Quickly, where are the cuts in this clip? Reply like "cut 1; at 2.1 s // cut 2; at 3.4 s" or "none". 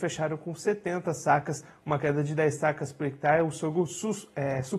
none

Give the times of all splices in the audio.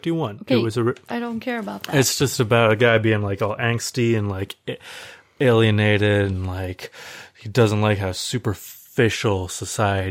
none

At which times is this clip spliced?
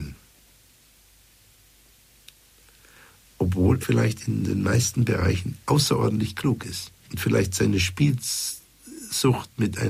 cut 1; at 3.8 s // cut 2; at 7.0 s

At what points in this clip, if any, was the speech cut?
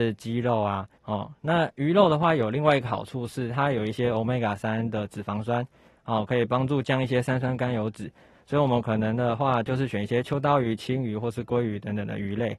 cut 1; at 1.0 s

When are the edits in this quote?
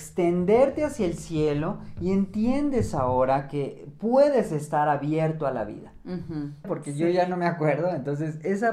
cut 1; at 6.6 s

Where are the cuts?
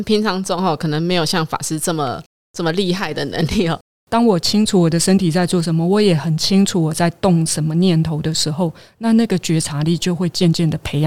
cut 1; at 4.0 s

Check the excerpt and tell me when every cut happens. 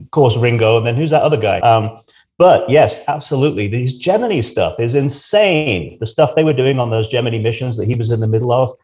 cut 1; at 1.6 s

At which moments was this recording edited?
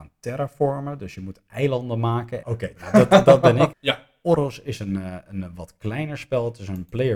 cut 1; at 2.4 s // cut 2; at 3.7 s

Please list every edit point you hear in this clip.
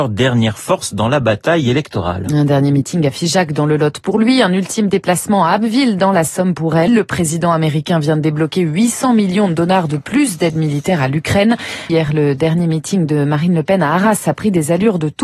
cut 1; at 6.9 s // cut 2; at 11.9 s

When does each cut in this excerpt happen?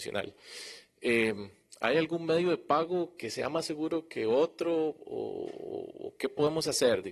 none

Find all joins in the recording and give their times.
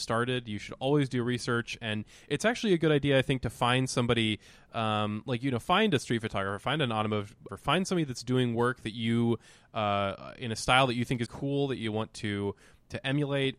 cut 1; at 7.5 s // cut 2; at 11.3 s

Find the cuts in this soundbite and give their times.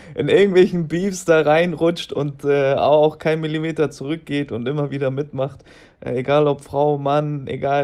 none

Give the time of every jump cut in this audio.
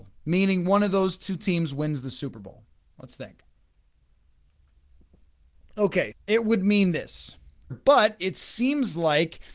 cut 1; at 6.1 s // cut 2; at 7.7 s

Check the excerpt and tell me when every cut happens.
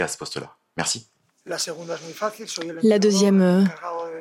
none

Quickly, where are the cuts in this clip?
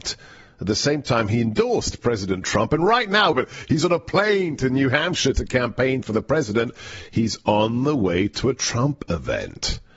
cut 1; at 3.3 s

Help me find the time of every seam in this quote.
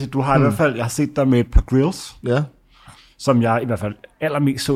none

